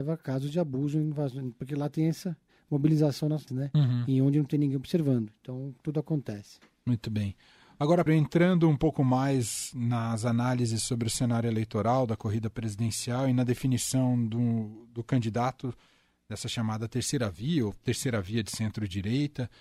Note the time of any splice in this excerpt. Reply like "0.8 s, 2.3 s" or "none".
3.5 s, 5.8 s, 8.1 s

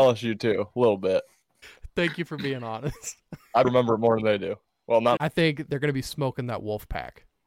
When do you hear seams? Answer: 3.6 s, 5.2 s

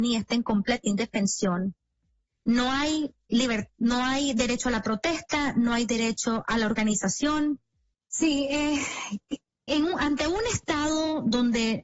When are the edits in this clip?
7.9 s, 9.7 s

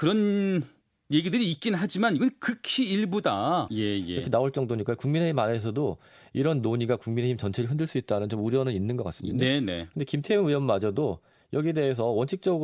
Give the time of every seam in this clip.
3.7 s, 9.3 s

